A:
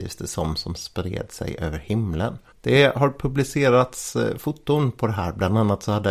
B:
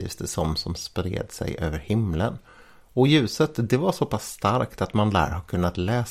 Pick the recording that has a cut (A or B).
A